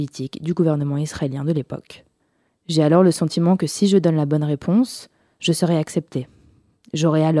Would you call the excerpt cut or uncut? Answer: cut